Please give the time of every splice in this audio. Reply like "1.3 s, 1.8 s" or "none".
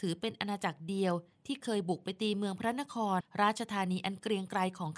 3.2 s